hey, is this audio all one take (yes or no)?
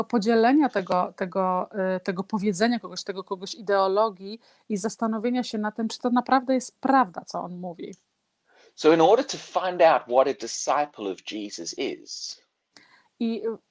yes